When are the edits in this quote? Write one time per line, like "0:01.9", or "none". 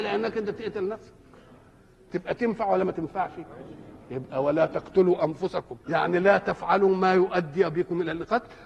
0:05.8